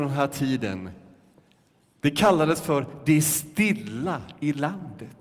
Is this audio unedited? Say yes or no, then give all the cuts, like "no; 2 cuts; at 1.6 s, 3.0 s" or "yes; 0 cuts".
yes; 0 cuts